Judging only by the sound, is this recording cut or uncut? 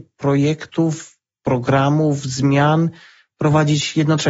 uncut